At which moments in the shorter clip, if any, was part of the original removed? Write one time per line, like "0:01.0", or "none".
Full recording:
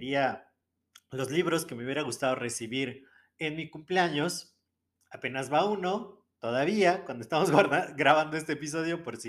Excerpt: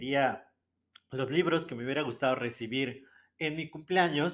none